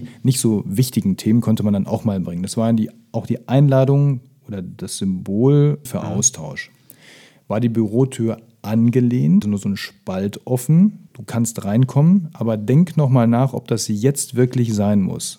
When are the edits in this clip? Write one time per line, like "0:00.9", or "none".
0:05.9
0:09.4
0:11.1